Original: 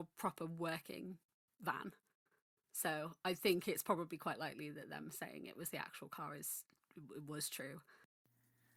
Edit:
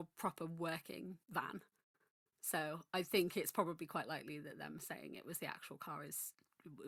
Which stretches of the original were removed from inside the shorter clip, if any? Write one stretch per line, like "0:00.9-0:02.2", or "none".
0:01.2-0:01.5

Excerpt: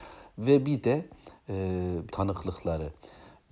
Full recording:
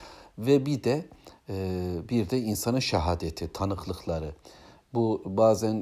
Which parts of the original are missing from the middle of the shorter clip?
0:02.1-0:03.5

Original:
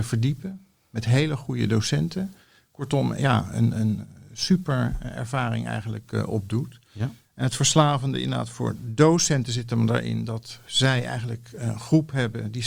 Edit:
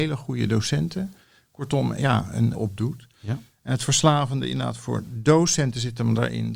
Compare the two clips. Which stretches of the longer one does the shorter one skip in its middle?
0:03.7-0:06.3

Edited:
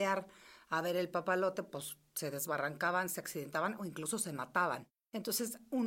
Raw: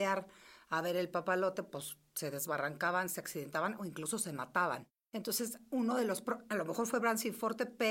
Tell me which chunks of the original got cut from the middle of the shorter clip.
none

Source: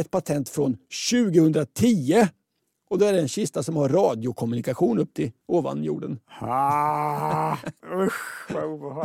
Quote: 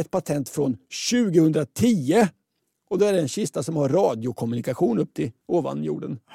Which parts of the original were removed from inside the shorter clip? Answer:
none

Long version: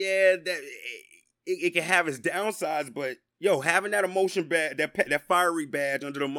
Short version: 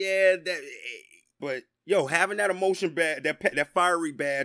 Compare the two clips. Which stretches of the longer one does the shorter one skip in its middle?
0:01.4-0:02.9

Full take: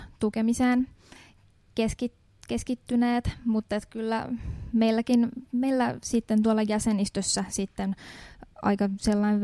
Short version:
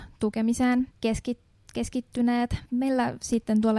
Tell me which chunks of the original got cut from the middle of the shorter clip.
0:00.9-0:01.6
0:03.4-0:05.5

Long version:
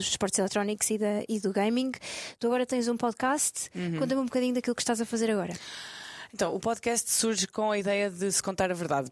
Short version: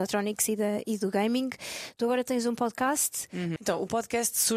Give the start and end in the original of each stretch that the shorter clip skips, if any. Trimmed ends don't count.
0:04.0-0:06.3

